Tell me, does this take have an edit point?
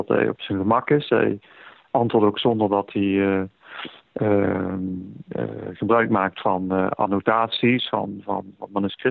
no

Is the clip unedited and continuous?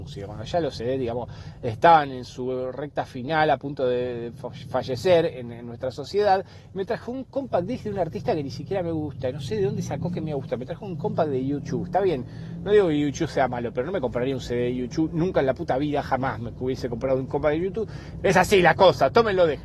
no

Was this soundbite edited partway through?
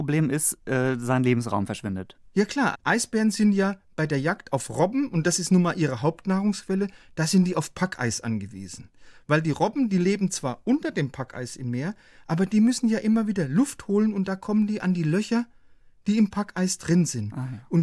yes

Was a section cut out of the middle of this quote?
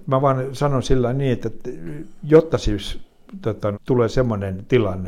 yes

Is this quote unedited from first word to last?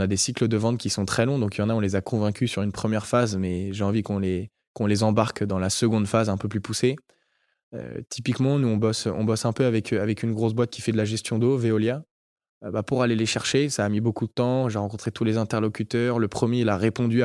yes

